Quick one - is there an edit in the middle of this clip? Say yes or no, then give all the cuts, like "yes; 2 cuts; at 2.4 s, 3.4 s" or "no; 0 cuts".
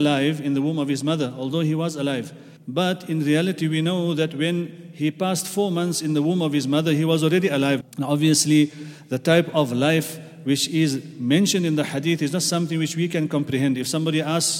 yes; 2 cuts; at 2.6 s, 7.8 s